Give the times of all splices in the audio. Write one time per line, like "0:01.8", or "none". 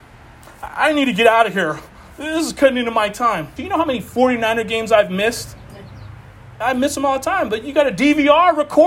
0:03.6